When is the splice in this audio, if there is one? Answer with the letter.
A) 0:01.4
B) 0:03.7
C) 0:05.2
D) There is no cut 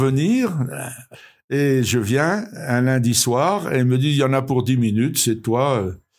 D